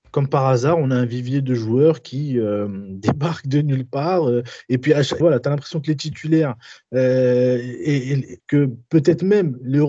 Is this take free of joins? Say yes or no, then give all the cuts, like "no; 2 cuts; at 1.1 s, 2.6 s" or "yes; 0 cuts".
no; 2 cuts; at 5.2 s, 8.4 s